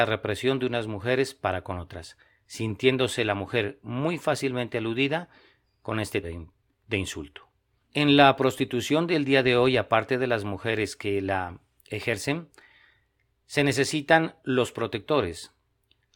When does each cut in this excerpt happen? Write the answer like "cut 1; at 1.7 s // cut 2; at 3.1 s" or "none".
cut 1; at 6.2 s // cut 2; at 7.8 s